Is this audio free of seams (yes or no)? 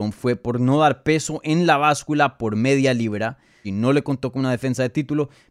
no